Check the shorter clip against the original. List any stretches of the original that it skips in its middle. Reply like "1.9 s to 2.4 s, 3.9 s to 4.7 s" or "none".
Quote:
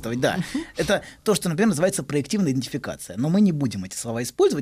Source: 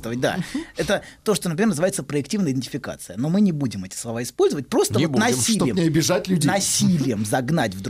none